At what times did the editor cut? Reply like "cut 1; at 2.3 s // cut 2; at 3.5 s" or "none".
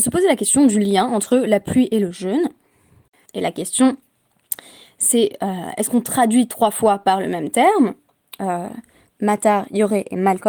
cut 1; at 3.3 s // cut 2; at 9.1 s